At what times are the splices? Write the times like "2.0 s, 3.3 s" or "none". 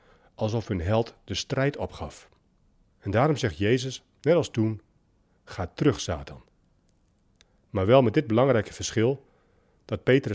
2.9 s